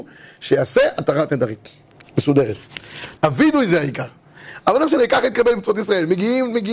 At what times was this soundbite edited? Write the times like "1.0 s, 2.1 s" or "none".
3.2 s